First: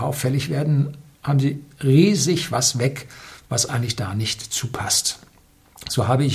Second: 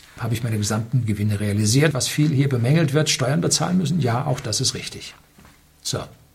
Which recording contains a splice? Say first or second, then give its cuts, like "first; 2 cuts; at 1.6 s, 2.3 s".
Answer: second; 1 cut; at 1.9 s